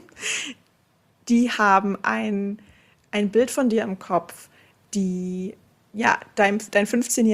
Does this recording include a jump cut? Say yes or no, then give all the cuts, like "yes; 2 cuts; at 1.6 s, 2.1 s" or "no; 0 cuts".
no; 0 cuts